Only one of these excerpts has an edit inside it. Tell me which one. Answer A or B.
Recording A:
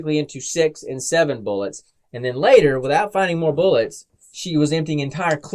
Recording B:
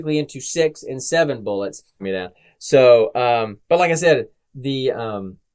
B